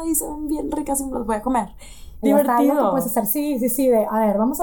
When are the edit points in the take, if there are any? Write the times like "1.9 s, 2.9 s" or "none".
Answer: 2.2 s